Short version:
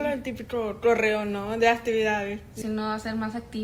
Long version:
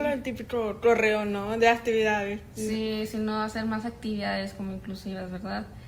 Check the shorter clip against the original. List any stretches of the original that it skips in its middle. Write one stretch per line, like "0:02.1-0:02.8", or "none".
0:02.6-0:03.1